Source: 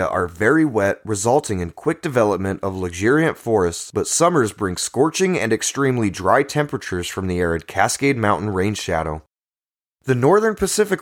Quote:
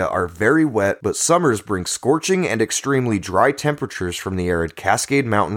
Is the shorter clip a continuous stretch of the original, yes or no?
no